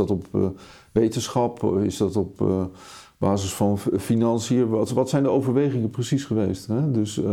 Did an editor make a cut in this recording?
no; 0 cuts

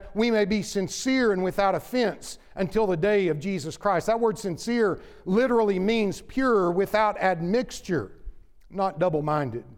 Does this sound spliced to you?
no; 0 cuts

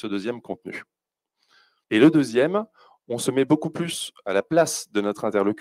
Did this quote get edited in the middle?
yes; 1 cut; at 1.8 s

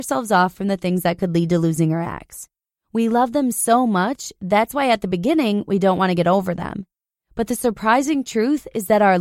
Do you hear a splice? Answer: no; 0 cuts

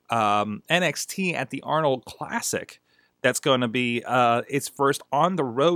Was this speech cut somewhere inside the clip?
no; 0 cuts

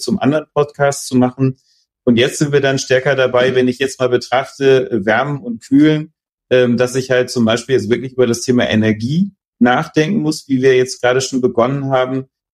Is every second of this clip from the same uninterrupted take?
yes; 0 cuts

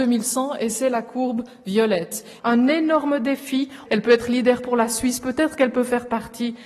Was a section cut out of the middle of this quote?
yes; 2 cuts; at 2.4 s, 3.9 s

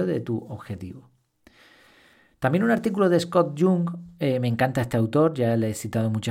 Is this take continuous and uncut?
yes; 0 cuts

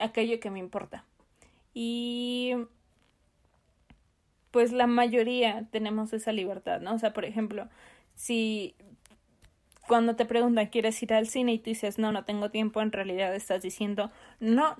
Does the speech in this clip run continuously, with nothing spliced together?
yes; 0 cuts

